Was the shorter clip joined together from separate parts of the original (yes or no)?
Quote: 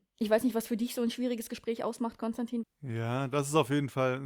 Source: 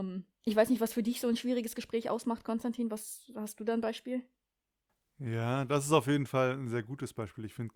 yes